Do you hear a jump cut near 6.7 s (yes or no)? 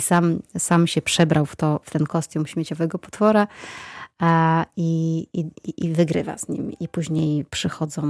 no